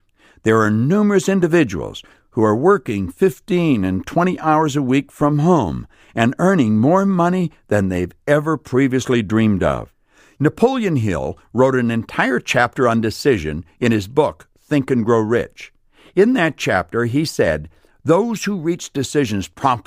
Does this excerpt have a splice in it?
yes; 1 cut; at 10.4 s

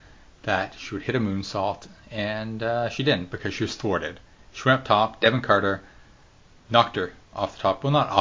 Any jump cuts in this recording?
no; 0 cuts

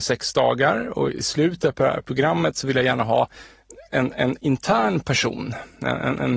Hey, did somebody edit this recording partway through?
no; 0 cuts

